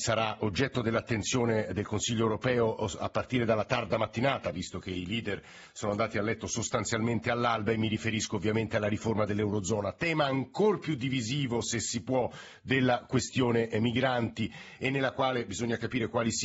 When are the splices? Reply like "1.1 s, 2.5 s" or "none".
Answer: none